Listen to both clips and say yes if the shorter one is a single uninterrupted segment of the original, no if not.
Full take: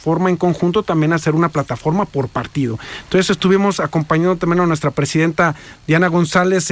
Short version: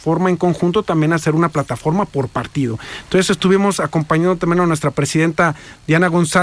yes